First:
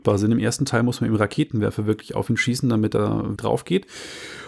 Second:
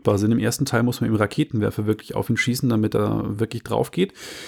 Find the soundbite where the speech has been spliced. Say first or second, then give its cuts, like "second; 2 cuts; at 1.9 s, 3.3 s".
first; 1 cut; at 3.4 s